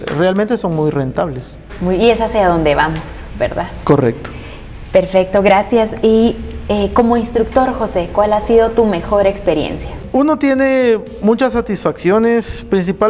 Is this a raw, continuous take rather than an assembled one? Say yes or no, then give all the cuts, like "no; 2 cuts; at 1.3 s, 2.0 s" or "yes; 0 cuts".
yes; 0 cuts